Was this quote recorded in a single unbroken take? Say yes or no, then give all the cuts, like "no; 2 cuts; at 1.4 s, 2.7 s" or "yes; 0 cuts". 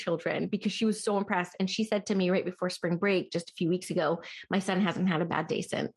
yes; 0 cuts